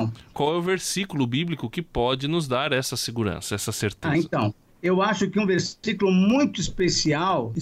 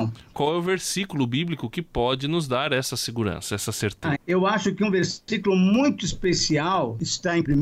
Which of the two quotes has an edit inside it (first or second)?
second